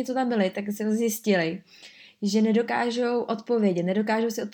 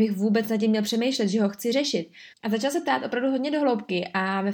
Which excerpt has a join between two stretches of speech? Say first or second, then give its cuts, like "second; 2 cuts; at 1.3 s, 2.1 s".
second; 1 cut; at 2.3 s